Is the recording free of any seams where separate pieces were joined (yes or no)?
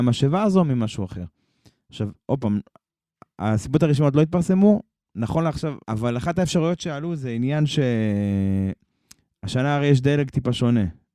no